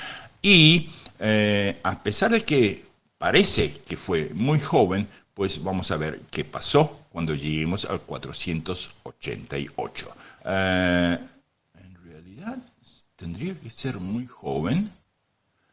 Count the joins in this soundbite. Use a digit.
1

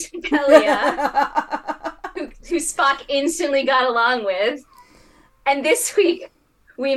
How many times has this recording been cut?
0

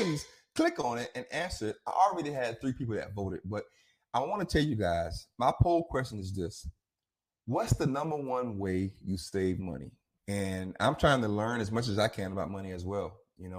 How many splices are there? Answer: 1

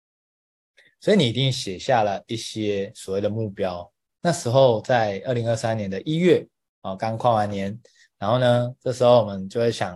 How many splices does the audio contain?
1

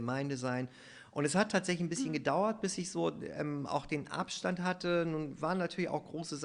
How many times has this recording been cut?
0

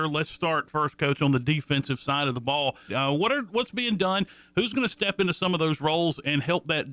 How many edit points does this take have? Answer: 1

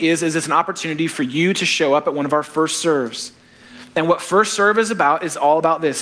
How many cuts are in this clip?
0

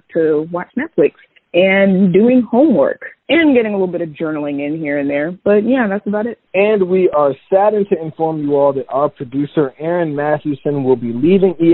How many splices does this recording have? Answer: 2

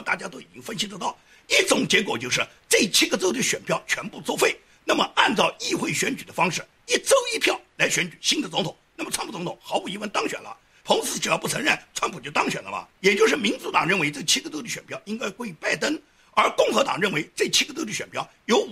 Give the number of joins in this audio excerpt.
2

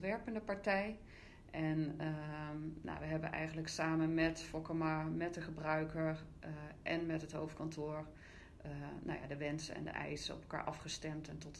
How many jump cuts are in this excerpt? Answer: 0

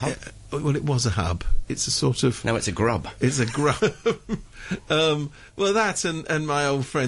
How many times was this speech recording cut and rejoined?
1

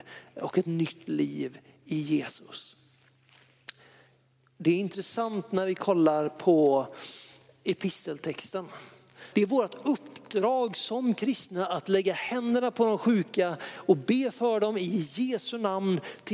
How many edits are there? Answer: 1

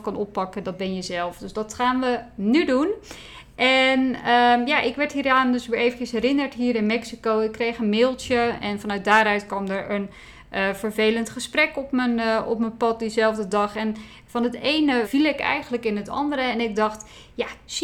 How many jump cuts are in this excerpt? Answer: 1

